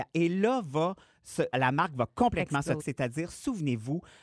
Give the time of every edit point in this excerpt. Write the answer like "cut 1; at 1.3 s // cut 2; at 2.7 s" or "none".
cut 1; at 1.5 s // cut 2; at 2.8 s

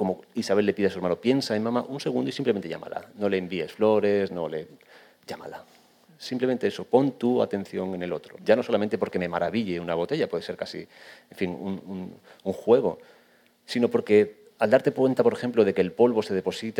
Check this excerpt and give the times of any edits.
cut 1; at 8.4 s

